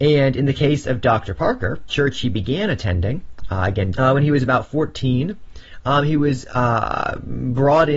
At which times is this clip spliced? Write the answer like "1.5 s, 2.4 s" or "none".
1.9 s, 3.9 s